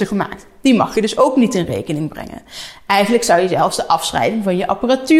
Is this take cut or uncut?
uncut